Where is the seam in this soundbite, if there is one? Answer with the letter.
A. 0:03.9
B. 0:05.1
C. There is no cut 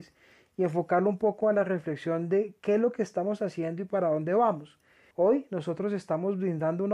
B